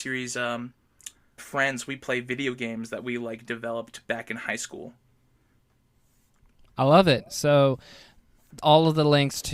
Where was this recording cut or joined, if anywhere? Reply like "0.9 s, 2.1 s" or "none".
1.4 s